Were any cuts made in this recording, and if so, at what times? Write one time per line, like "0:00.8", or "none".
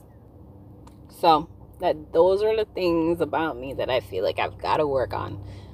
0:01.7